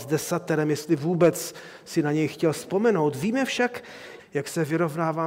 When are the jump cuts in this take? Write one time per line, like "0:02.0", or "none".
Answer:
0:04.2